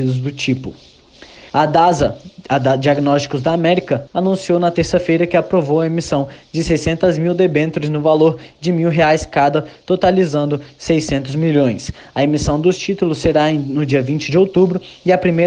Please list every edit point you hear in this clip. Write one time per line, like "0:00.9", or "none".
0:01.5
0:04.1